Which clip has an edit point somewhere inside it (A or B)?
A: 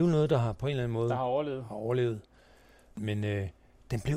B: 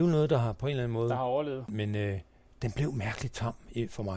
B